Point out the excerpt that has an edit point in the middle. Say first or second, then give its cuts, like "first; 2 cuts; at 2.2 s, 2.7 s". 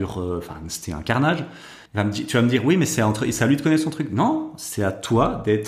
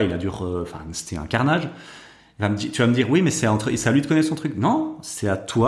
first; 1 cut; at 1.9 s